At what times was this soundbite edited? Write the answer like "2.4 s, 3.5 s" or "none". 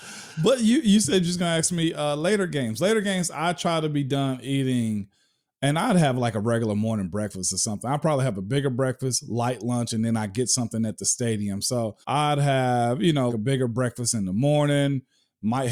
12.0 s, 13.3 s